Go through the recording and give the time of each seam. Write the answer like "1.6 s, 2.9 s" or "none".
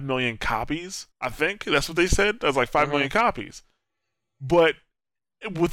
1.1 s